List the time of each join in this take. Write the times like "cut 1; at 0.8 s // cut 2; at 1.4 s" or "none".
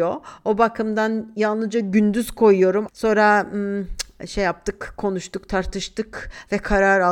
cut 1; at 2.9 s